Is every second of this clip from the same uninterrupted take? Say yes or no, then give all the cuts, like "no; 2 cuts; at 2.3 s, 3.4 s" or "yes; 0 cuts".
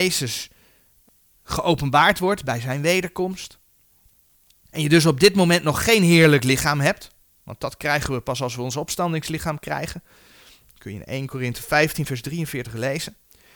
yes; 0 cuts